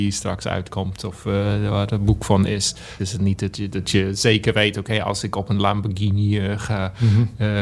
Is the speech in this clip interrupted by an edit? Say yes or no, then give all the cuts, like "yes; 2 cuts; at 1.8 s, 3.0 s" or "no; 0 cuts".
yes; 1 cut; at 3.0 s